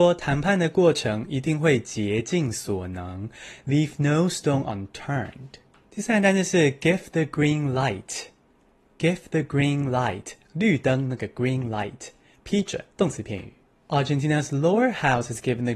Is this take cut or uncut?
cut